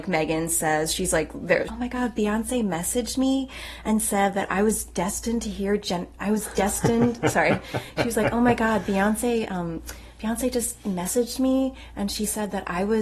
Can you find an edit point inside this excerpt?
yes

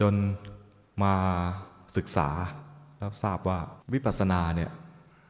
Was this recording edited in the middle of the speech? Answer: yes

